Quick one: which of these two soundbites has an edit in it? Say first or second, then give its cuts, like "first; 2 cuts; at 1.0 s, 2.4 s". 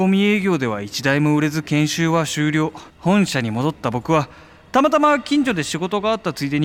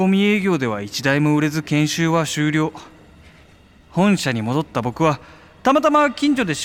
first; 1 cut; at 2.9 s